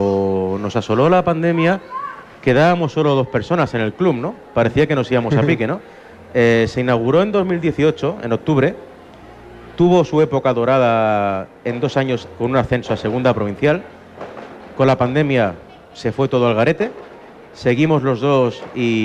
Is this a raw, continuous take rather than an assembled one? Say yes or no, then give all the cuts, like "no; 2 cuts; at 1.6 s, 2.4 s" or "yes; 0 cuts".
yes; 0 cuts